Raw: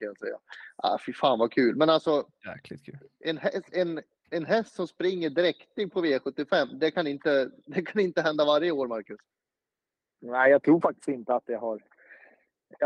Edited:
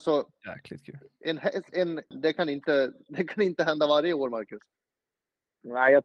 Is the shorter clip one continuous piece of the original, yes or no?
no